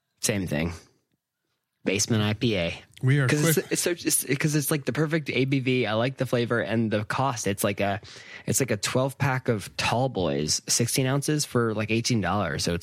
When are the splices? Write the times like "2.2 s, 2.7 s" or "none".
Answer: none